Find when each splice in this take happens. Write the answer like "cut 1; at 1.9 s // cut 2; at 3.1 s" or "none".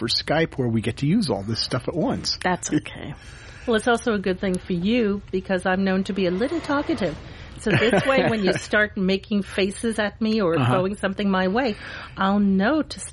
none